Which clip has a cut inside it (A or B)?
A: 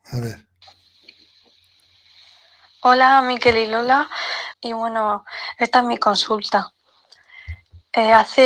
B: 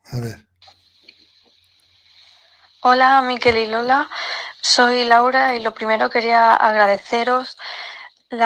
A